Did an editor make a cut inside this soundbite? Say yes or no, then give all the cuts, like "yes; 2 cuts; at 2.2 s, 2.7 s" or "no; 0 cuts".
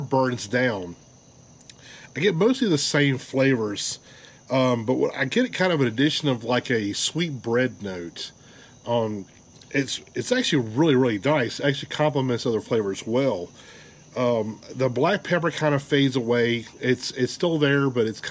no; 0 cuts